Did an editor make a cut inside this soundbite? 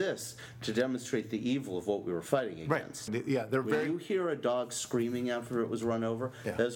yes; 1 cut; at 3.1 s

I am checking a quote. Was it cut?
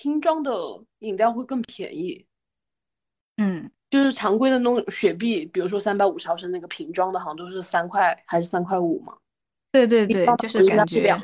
no; 0 cuts

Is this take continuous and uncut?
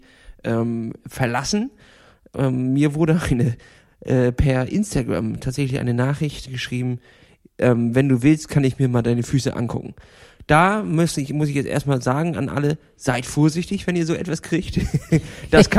no; 1 cut; at 6.5 s

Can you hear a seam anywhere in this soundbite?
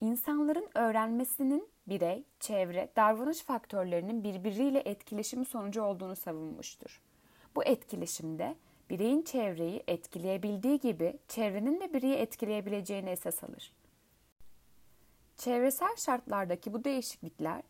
no; 0 cuts

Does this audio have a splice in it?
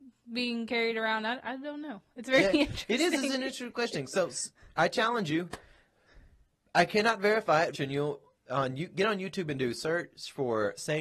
yes; 1 cut; at 7.7 s

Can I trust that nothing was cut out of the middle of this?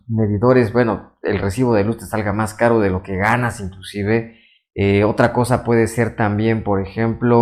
yes; 0 cuts

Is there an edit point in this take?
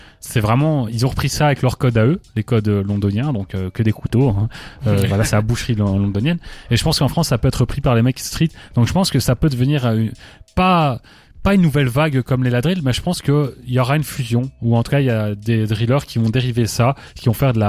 no; 0 cuts

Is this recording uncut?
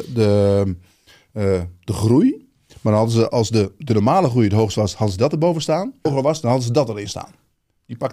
no; 2 cuts; at 3.3 s, 6.1 s

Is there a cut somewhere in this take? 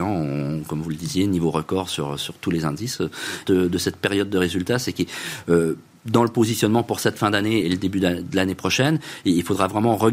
yes; 2 cuts; at 3.4 s, 7.6 s

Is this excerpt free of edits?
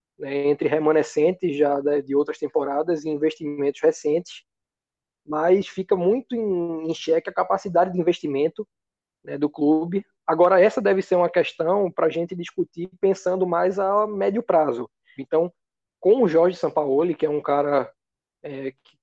no; 1 cut; at 15.2 s

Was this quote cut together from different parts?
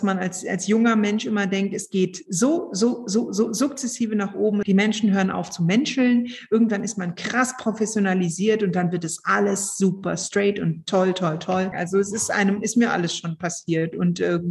yes; 2 cuts; at 4.6 s, 11.7 s

